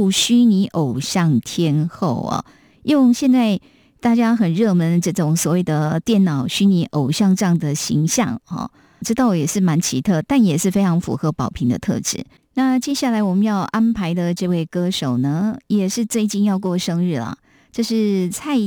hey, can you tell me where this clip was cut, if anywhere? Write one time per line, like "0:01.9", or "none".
0:09.0